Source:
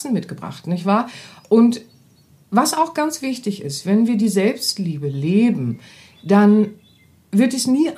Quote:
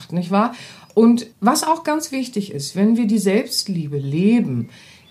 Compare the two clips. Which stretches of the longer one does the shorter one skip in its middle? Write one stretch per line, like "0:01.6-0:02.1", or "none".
0:01.9-0:02.4

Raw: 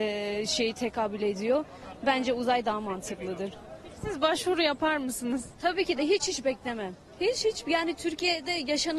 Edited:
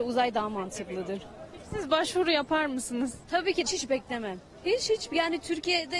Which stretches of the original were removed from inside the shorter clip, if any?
0:06.0-0:06.2

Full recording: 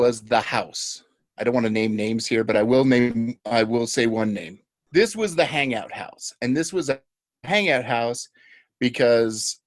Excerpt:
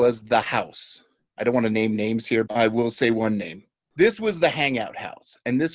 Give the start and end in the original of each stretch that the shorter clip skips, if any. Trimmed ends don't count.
0:02.5-0:03.4

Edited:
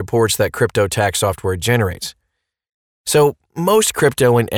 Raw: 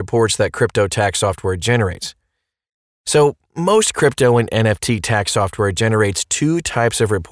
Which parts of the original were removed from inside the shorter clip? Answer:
none

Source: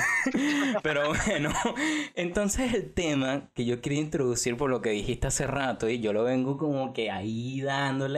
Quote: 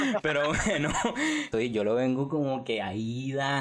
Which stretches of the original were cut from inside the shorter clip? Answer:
0:02.1-0:05.8

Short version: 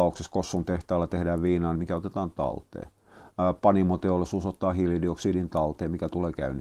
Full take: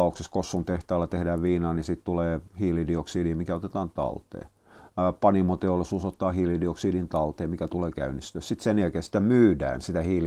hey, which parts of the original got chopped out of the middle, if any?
0:01.8-0:03.3

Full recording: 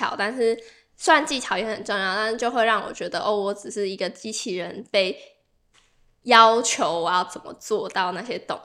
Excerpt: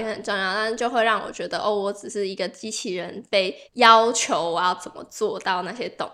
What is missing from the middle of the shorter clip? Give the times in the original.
0:05.3-0:06.1

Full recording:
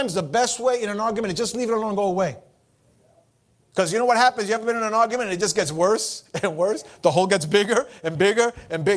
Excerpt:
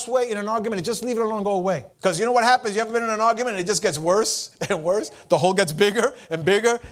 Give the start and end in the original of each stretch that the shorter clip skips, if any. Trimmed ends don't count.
0:02.4-0:03.6

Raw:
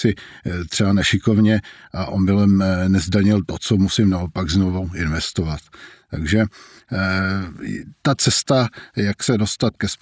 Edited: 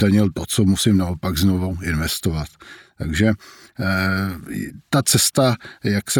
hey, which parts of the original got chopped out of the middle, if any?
none

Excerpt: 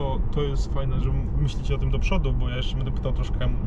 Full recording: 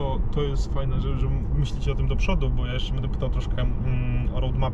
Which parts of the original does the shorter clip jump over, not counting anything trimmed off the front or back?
0:01.0-0:01.2

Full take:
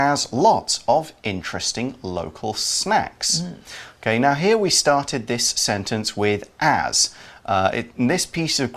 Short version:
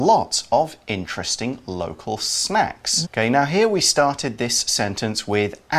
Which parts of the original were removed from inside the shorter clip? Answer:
0:03.4-0:03.9

